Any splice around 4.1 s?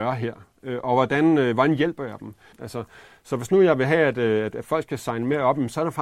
no; 1 cut; at 2.5 s

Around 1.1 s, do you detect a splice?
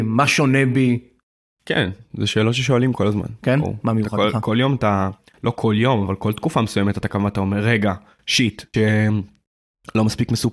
no; 1 cut; at 8.7 s

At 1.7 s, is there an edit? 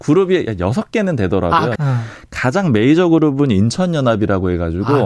yes; 1 cut; at 1.7 s

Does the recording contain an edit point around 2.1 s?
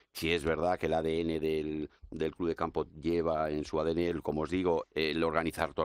no; 1 cut; at 4.8 s

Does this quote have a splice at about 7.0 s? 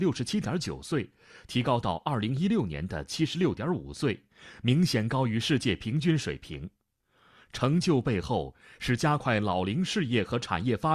no; 0 cuts

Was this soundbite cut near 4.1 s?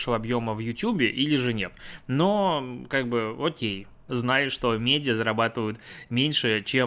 yes; 1 cut; at 4.1 s

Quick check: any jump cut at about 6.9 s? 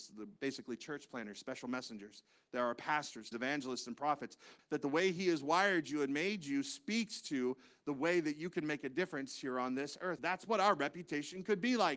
no; 3 cuts; at 3.3 s, 4.6 s, 10.2 s

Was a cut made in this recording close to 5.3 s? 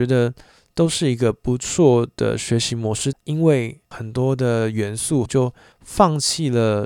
yes; 2 cuts; at 3.1 s, 5.3 s

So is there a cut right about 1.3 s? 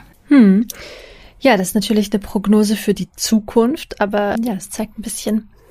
no; 1 cut; at 4.4 s

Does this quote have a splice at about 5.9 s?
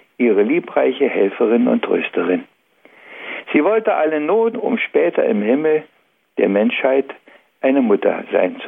no; 1 cut; at 4.5 s

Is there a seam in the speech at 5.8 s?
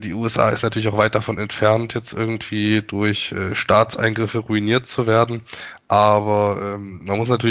no; 0 cuts

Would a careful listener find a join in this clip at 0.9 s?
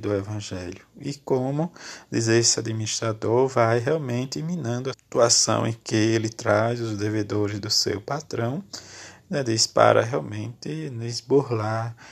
no; 1 cut; at 4.9 s

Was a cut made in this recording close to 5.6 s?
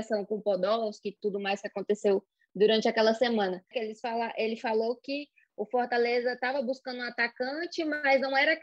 no; 2 cuts; at 1.2 s, 3.7 s

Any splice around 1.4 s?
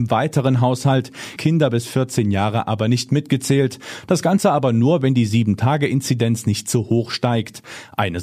yes; 1 cut; at 1.4 s

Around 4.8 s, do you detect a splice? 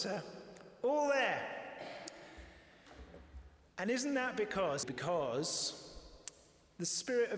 yes; 1 cut; at 4.8 s

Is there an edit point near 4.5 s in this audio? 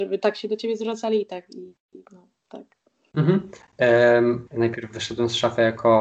yes; 1 cut; at 4.5 s

